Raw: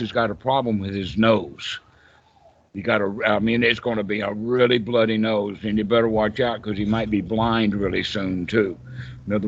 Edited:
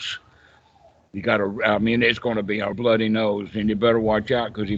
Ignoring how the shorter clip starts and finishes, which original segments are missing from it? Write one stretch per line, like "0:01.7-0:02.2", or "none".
0:04.3-0:04.8